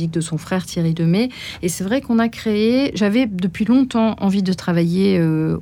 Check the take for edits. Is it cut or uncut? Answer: uncut